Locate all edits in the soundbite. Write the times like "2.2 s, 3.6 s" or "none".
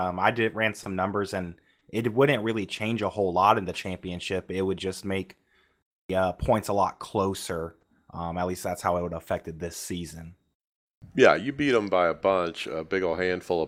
none